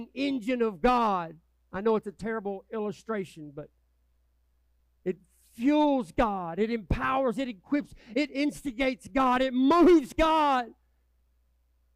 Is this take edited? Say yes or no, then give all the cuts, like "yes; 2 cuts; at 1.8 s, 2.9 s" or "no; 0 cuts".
no; 0 cuts